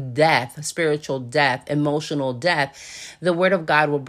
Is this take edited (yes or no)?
no